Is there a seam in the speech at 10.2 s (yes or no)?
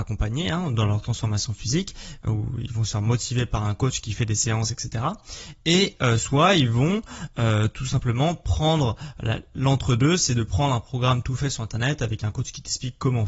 no